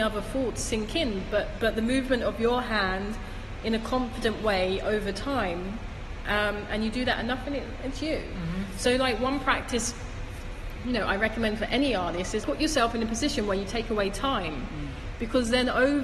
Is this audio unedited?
no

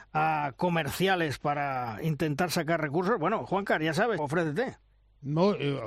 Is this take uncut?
no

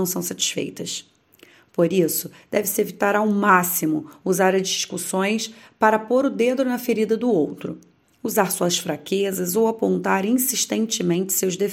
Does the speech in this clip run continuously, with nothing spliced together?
yes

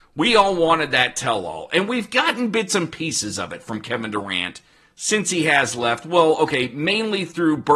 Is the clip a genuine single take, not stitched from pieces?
yes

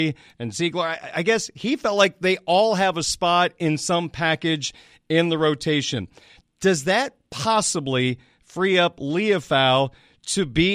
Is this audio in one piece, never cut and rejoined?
yes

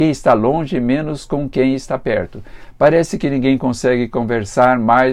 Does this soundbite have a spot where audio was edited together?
no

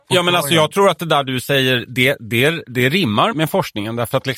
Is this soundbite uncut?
no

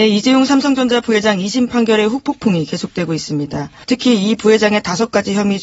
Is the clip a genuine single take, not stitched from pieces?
no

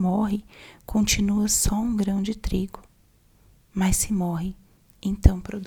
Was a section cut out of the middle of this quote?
no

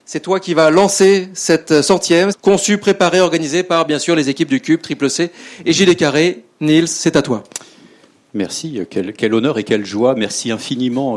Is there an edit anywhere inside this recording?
yes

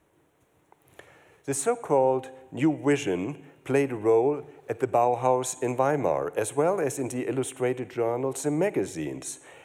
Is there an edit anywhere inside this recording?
no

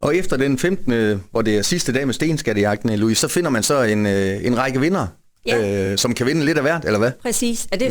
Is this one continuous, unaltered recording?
yes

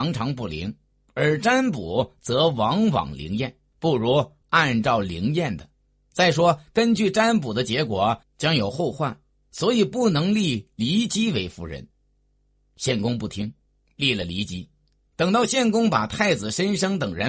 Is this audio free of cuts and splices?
yes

